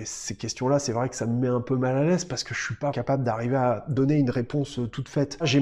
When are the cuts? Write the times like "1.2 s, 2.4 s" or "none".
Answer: 2.9 s